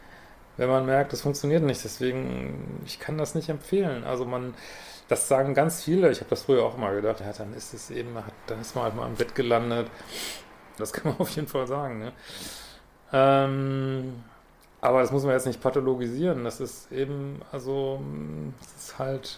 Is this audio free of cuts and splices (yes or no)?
no